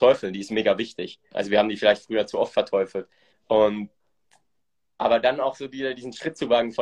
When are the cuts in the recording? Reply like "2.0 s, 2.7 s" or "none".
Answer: 3.3 s